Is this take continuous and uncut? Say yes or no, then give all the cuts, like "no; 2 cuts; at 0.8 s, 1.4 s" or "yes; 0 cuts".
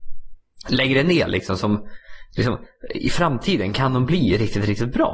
yes; 0 cuts